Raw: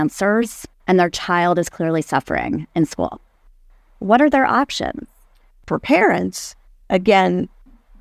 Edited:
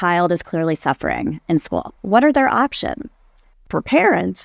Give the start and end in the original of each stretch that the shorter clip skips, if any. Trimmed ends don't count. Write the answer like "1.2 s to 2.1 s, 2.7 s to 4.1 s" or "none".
3.2 s to 3.9 s